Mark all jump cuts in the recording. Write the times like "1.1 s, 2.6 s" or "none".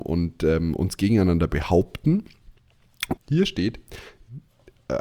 3.2 s